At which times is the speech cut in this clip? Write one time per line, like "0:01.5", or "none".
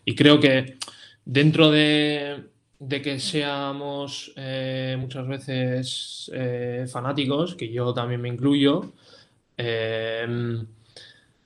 none